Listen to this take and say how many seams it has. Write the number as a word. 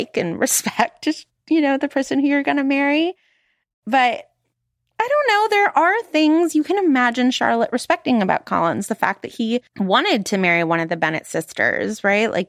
one